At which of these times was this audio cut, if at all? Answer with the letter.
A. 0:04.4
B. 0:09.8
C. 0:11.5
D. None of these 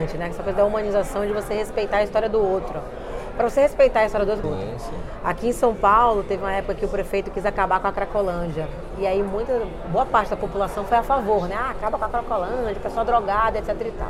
A